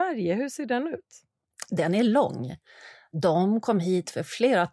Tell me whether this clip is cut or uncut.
uncut